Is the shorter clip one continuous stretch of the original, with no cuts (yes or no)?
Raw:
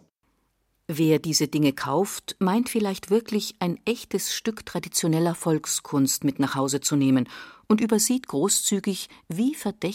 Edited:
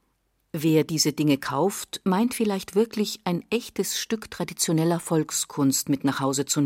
yes